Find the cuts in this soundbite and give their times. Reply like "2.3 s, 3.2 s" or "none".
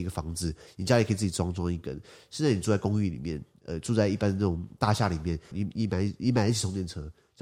5.5 s